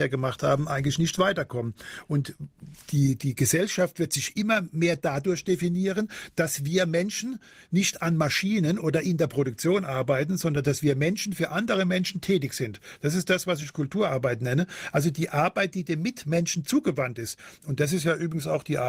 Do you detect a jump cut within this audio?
no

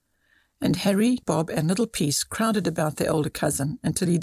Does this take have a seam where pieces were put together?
yes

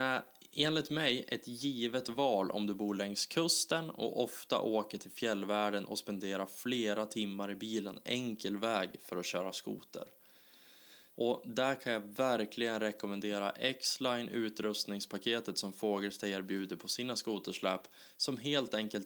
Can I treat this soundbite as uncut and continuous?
no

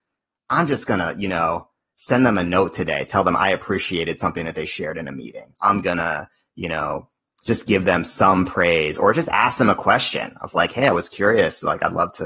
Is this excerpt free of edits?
yes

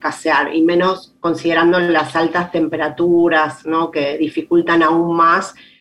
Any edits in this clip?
no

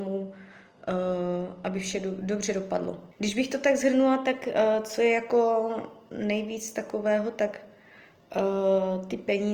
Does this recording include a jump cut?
yes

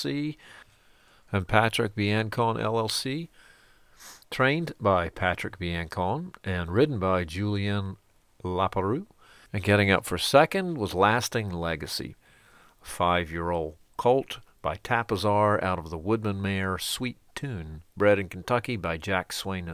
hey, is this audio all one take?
no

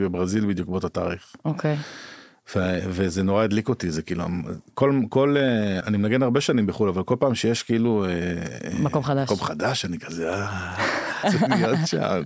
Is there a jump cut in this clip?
yes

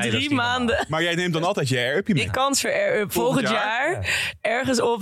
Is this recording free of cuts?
no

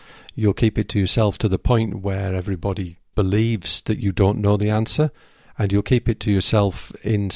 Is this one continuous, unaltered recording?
no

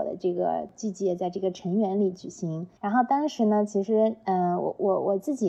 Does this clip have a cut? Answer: yes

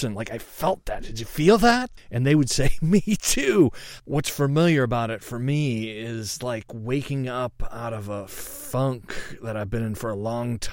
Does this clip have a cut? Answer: no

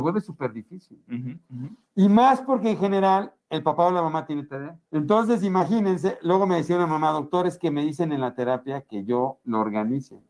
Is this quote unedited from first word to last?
no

